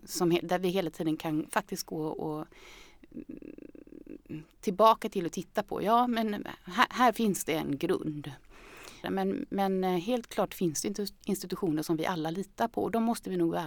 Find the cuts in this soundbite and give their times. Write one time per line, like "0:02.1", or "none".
0:09.0